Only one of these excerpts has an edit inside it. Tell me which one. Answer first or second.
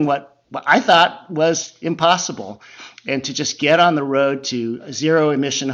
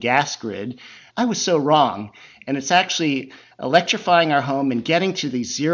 second